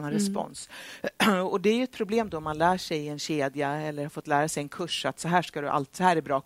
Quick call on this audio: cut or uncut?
uncut